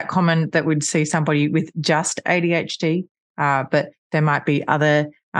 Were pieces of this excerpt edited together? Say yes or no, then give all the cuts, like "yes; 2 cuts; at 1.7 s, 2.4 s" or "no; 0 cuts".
no; 0 cuts